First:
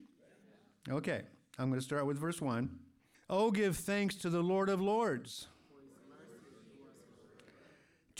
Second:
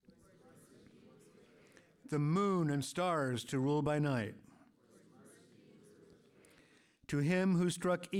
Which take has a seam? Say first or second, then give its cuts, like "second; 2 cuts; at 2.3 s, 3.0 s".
first; 1 cut; at 3.1 s